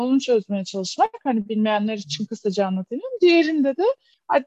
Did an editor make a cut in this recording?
no; 0 cuts

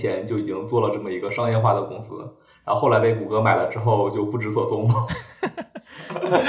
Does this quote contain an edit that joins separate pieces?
no; 0 cuts

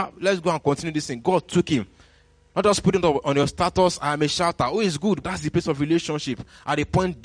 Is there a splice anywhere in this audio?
yes; 2 cuts; at 2.5 s, 5.2 s

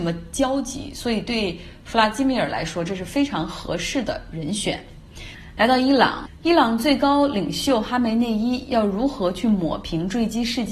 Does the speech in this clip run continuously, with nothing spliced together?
yes; 0 cuts

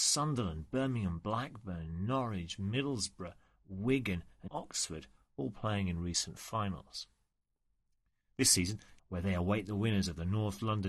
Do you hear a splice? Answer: yes; 2 cuts; at 4.5 s, 9.0 s

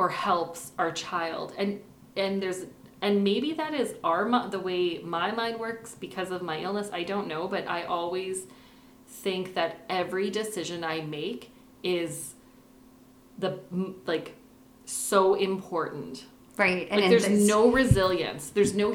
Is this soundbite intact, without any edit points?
yes; 0 cuts

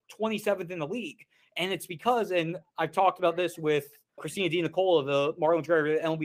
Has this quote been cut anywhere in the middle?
yes; 1 cut; at 4.2 s

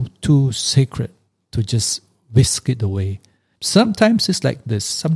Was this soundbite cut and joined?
yes; 1 cut; at 3.5 s

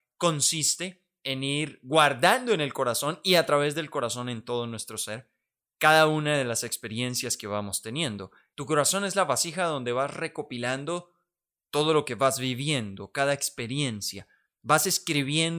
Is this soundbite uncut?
no; 1 cut; at 8.5 s

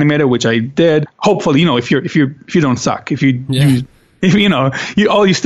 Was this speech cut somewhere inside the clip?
yes; 1 cut; at 1.1 s

